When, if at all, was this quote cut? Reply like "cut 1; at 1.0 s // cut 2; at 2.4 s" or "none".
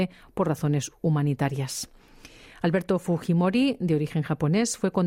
none